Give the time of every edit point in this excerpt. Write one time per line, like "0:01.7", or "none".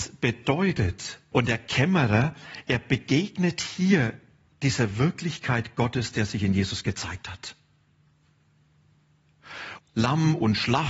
0:01.3
0:09.8